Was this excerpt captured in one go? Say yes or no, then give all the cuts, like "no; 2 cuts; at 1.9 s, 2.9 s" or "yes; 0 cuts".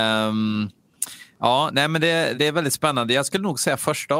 no; 1 cut; at 2.3 s